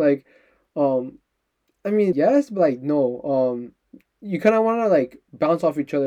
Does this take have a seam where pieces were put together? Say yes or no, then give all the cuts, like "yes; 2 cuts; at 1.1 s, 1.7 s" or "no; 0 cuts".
yes; 1 cut; at 2.1 s